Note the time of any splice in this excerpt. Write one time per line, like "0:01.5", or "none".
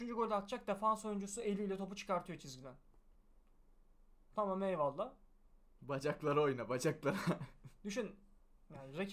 0:05.8